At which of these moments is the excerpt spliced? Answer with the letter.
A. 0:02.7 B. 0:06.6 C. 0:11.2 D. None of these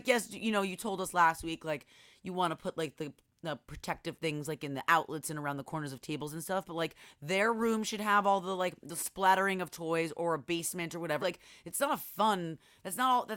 C